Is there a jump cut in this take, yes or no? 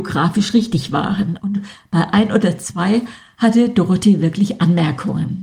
no